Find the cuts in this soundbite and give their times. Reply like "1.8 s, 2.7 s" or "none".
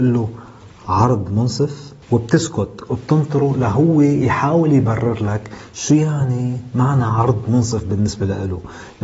2.0 s